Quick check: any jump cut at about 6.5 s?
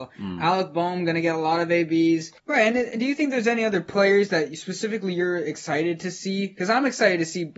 no; 1 cut; at 2.4 s

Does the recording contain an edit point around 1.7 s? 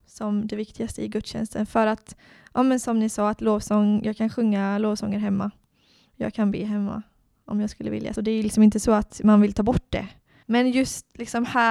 no; 2 cuts; at 8.2 s, 10.4 s

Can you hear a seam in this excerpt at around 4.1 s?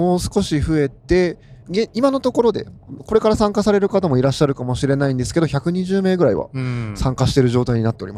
no; 1 cut; at 1.6 s

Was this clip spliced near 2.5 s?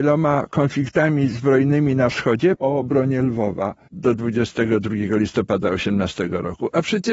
yes; 2 cuts; at 2.5 s, 3.9 s

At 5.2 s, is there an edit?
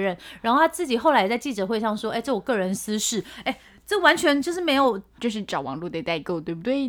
yes; 1 cut; at 5.2 s

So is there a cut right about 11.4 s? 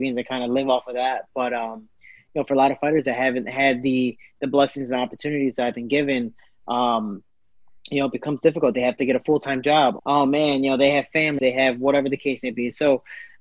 yes; 2 cuts; at 10.0 s, 11.4 s

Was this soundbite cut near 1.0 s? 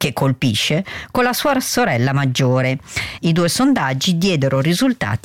no; 1 cut; at 3.2 s

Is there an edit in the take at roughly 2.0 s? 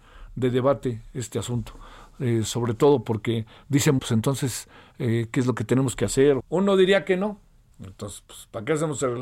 no; 3 cuts; at 4.0 s, 6.4 s, 7.7 s

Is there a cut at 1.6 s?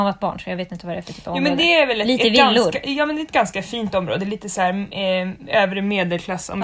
no; 0 cuts

